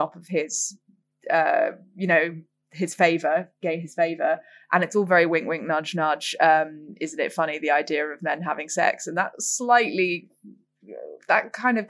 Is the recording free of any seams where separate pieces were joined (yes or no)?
yes